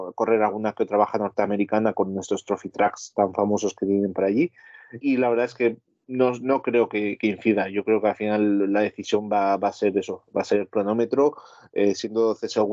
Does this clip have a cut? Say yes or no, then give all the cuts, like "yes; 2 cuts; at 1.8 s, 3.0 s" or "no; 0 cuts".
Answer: yes; 1 cut; at 5.0 s